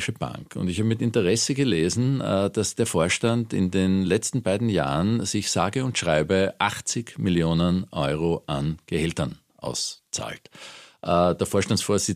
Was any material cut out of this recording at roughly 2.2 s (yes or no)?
no